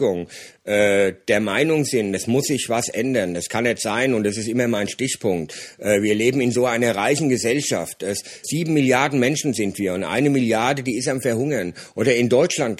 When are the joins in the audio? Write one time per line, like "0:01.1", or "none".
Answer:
0:08.4

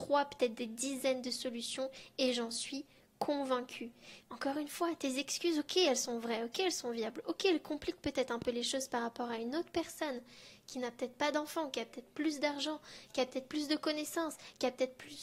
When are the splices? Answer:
0:04.2

